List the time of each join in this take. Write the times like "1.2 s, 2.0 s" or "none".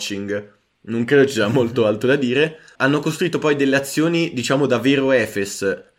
2.8 s